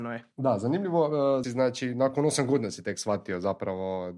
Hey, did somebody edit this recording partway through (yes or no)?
yes